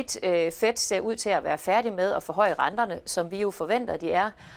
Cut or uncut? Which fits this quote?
uncut